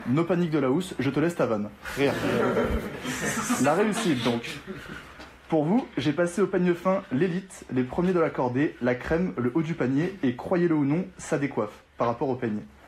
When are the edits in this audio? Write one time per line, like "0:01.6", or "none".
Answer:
none